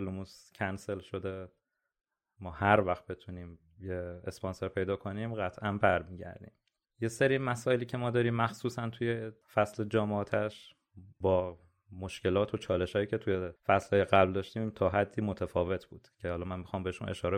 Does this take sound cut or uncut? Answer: cut